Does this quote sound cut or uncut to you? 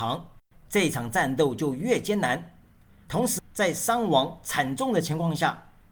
cut